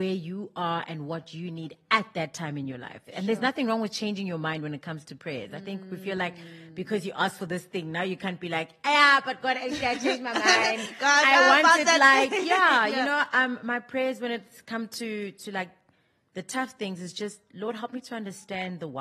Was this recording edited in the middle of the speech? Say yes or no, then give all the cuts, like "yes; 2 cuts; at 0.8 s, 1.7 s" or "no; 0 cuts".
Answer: no; 0 cuts